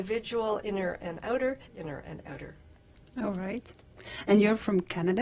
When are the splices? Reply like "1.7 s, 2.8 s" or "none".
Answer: 1.7 s